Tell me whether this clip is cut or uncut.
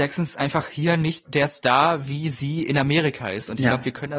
cut